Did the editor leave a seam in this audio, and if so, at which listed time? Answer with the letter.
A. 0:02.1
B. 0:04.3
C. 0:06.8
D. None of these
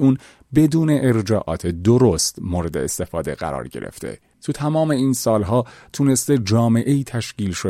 B